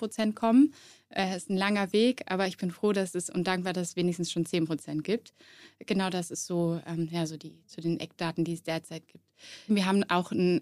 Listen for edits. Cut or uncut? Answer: cut